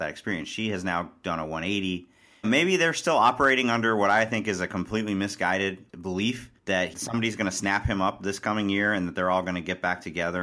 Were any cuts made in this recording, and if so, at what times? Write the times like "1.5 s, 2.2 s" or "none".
2.4 s, 6.6 s